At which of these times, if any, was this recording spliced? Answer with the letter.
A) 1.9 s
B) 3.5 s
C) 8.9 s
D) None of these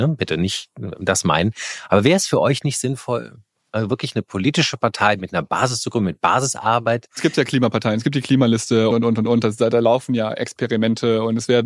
C